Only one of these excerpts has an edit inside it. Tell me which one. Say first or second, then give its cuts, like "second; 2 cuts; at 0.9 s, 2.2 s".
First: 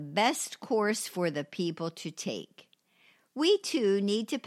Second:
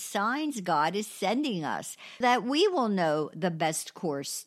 second; 1 cut; at 2.2 s